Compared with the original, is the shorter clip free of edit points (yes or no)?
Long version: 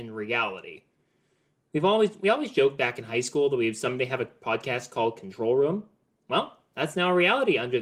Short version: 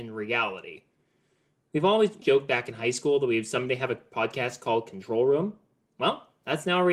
no